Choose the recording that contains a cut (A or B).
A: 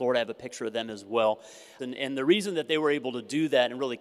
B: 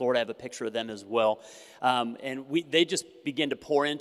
A